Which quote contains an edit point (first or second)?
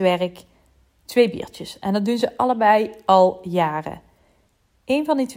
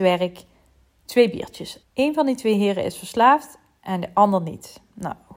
second